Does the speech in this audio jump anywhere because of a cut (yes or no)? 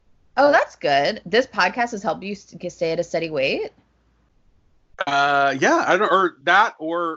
no